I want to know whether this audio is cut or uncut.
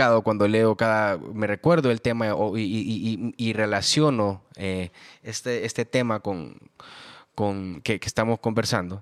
uncut